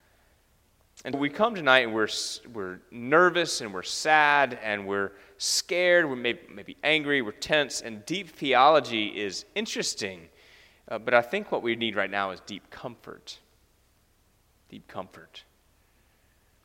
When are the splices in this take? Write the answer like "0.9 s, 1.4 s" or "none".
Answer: 1.1 s